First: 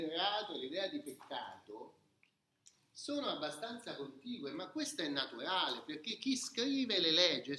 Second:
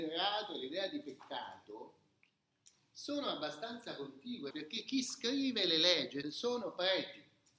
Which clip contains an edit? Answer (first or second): second